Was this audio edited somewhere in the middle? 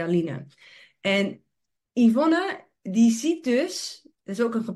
no; 0 cuts

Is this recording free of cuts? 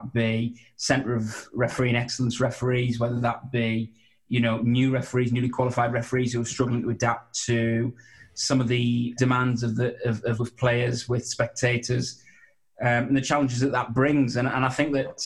no; 2 cuts; at 9.2 s, 10.4 s

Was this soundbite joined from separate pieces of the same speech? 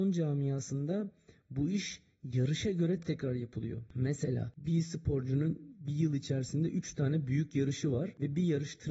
yes; 1 cut; at 3.0 s

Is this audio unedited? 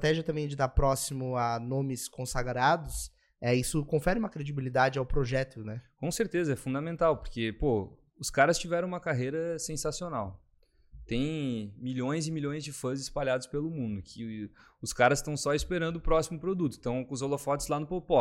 yes; 0 cuts

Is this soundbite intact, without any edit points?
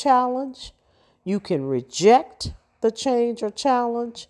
yes; 0 cuts

